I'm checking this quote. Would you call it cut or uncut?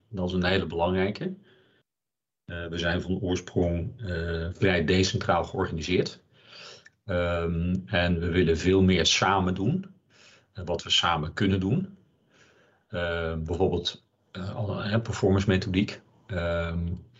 uncut